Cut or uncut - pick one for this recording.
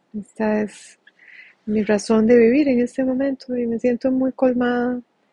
uncut